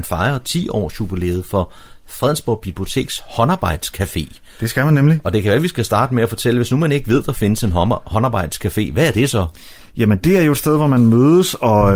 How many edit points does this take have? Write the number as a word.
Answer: zero